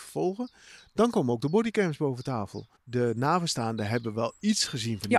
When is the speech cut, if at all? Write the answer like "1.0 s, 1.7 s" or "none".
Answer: 2.8 s